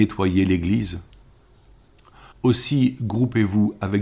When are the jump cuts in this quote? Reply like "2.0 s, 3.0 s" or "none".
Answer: 2.3 s